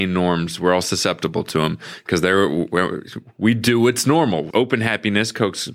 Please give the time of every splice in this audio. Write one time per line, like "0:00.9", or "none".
0:04.5